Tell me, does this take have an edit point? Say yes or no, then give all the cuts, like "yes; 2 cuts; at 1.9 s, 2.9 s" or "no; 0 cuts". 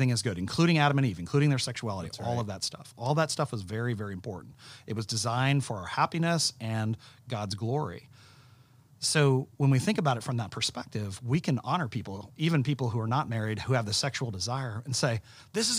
no; 0 cuts